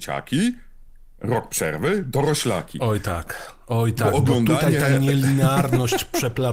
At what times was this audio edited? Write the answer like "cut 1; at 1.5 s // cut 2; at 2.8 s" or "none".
none